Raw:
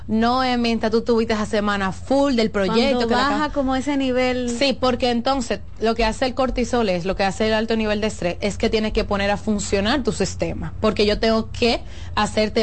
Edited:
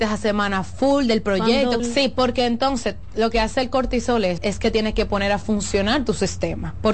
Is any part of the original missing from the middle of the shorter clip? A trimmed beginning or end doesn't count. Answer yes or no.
yes